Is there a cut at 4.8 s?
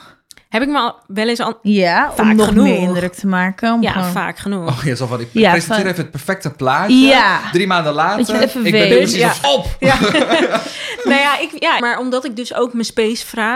no; 2 cuts; at 9.4 s, 11.8 s

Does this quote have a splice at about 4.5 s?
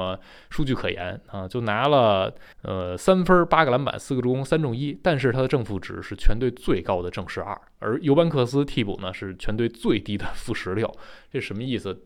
no; 1 cut; at 2.5 s

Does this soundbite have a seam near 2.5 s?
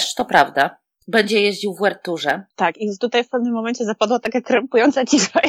yes; 1 cut; at 2.5 s

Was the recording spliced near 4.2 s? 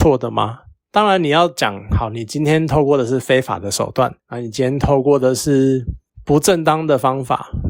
yes; 1 cut; at 4.2 s

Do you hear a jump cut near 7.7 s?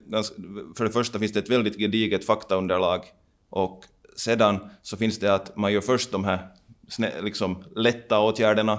no; 0 cuts

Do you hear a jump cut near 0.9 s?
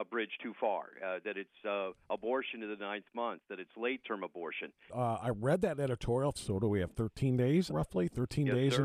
no; 3 cuts; at 4.9 s, 6.3 s, 7.7 s

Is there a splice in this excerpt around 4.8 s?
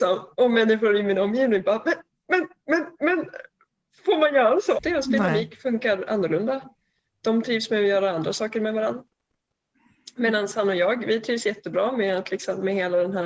yes; 1 cut; at 4.8 s

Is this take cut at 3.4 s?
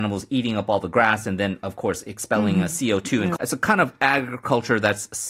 yes; 1 cut; at 3.4 s

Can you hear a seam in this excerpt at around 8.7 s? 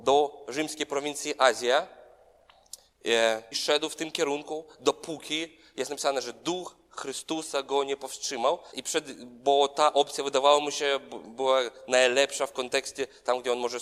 yes; 2 cuts; at 3.5 s, 8.7 s

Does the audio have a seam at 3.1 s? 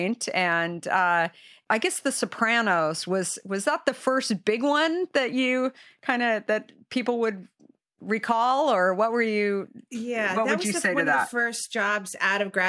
no; 0 cuts

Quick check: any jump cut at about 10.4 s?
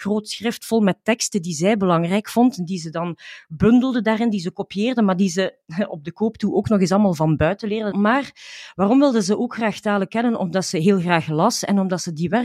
no; 1 cut; at 7.9 s

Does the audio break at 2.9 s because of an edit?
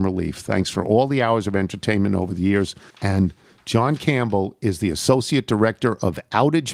yes; 1 cut; at 2.9 s

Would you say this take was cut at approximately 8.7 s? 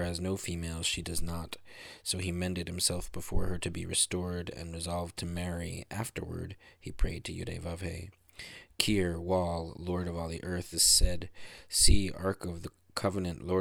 no; 1 cut; at 10.7 s

